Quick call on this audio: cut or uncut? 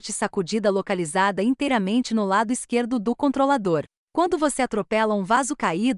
uncut